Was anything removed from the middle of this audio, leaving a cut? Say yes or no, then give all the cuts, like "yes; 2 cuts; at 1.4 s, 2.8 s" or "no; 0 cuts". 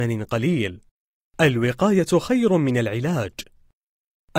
yes; 1 cut; at 1.3 s